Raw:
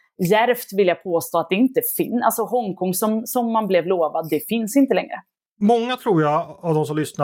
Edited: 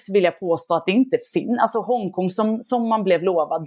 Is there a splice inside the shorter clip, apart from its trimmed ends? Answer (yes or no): no